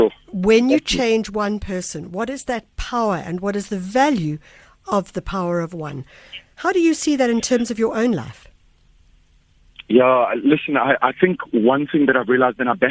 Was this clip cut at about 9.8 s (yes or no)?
no